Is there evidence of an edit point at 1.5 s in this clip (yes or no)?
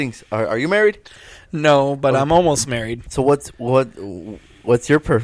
no